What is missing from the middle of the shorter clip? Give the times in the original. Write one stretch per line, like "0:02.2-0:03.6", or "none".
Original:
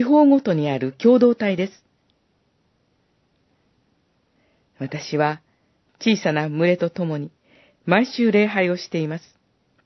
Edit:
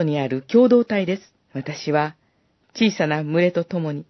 0:01.9-0:04.7